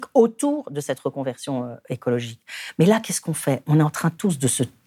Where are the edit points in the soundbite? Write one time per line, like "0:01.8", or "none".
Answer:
none